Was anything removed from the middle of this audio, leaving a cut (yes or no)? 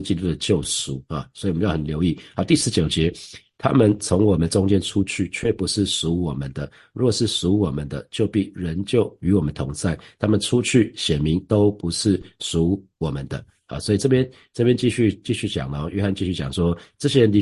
no